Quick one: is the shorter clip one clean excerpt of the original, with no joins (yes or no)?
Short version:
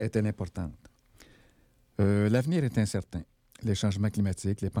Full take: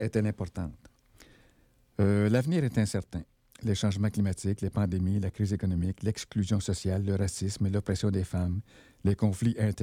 yes